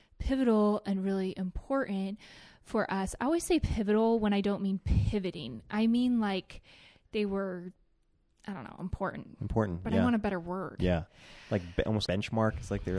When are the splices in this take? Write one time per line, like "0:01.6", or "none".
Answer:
0:12.1